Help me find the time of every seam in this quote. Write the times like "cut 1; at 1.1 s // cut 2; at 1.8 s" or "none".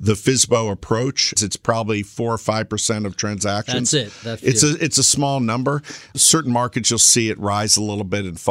cut 1; at 1.4 s